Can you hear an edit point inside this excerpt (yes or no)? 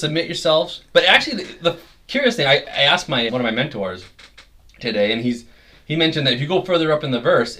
yes